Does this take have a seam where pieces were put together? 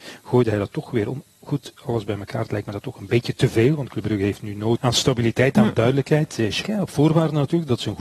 yes; 2 cuts; at 4.8 s, 6.6 s

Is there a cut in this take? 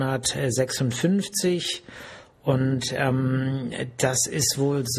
no; 0 cuts

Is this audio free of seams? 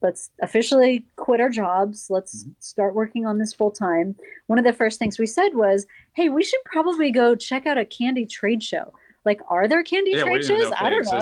yes; 0 cuts

